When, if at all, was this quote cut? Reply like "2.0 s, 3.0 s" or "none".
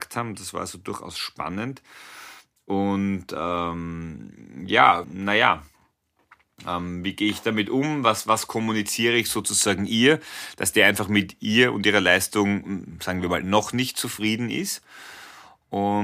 5.0 s